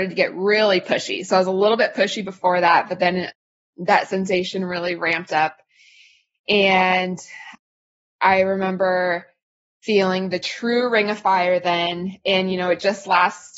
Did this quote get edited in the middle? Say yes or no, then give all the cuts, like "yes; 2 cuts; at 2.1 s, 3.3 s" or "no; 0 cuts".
no; 0 cuts